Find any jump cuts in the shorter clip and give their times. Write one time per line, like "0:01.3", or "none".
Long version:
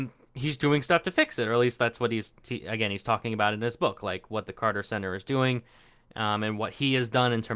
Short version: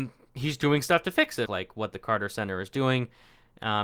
0:01.5